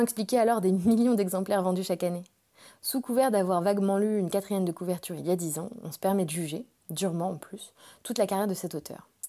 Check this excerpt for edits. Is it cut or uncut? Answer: uncut